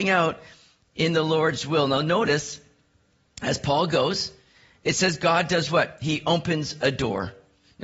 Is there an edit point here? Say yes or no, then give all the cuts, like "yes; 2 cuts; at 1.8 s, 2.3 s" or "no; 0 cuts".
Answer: no; 0 cuts